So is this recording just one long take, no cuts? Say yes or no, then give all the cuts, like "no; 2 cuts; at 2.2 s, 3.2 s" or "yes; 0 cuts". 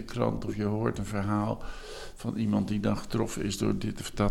yes; 0 cuts